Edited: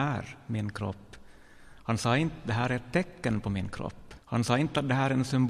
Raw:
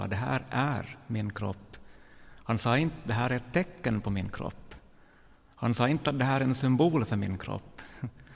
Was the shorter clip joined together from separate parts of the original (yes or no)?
yes